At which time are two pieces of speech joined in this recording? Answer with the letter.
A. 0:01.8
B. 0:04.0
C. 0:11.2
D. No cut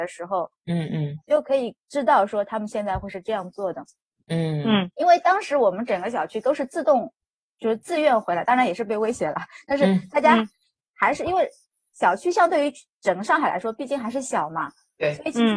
A